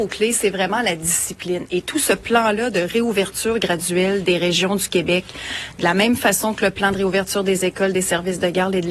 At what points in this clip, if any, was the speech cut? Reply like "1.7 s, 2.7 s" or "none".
none